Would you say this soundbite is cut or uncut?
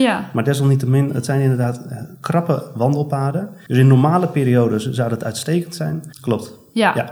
cut